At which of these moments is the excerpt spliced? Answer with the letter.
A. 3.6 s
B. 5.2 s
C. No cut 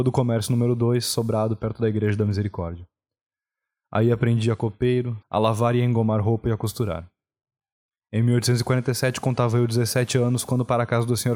B